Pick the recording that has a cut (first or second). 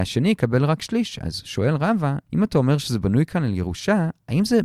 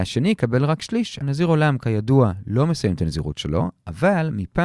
second